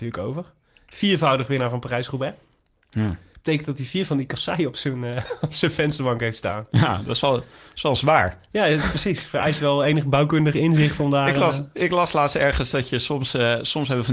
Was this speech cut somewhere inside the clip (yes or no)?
no